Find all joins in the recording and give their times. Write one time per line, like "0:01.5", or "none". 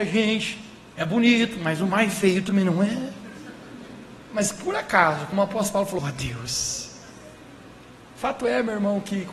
0:04.3
0:06.0